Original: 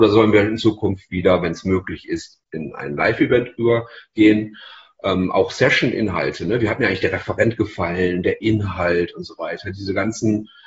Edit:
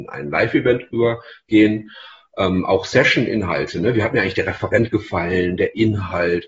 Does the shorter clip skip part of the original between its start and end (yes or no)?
no